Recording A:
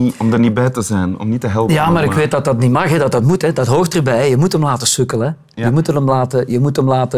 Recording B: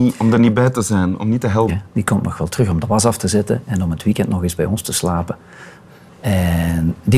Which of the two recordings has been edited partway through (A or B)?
B